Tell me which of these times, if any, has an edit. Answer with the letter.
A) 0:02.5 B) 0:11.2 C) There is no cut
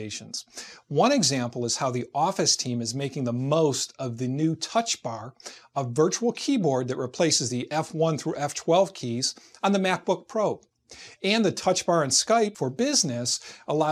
B